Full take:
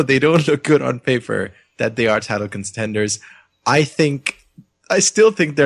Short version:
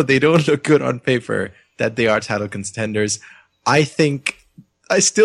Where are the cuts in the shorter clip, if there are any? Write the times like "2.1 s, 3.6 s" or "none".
none

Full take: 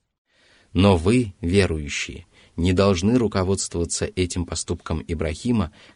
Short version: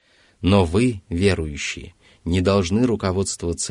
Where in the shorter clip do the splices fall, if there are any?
none

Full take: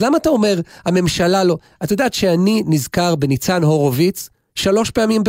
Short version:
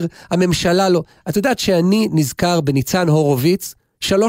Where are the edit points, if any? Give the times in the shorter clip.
none

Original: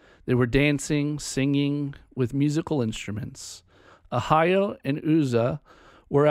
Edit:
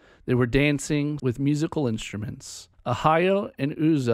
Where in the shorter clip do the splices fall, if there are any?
1.2 s, 2.7 s

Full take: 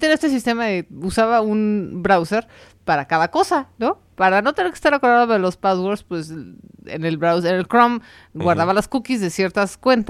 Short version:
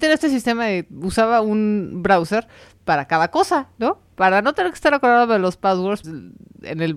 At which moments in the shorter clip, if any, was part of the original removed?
6.0 s

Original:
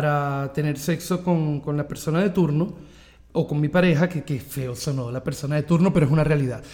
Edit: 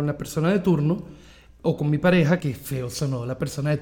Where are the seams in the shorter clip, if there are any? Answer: 2.4 s

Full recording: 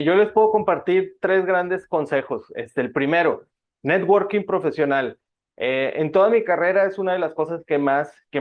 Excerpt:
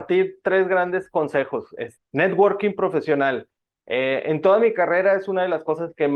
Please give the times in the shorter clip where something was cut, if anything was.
2.0 s

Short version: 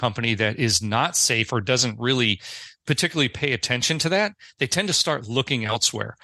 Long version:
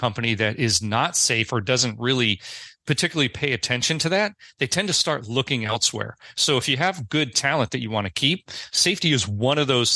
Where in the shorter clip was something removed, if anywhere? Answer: none

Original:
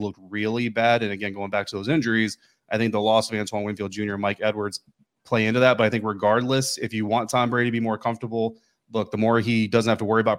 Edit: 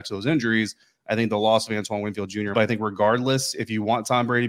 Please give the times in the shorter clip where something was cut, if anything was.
2.5 s

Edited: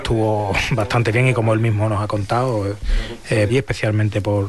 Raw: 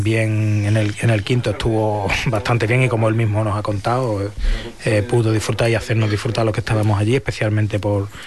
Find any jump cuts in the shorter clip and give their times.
3.5 s

